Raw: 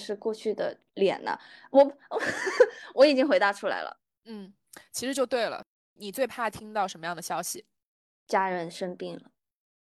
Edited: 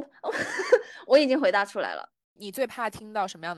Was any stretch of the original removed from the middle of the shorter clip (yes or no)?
yes